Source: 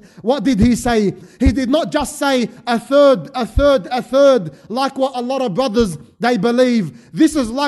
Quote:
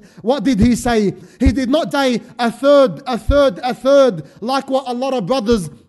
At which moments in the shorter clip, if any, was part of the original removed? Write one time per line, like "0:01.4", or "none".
0:01.9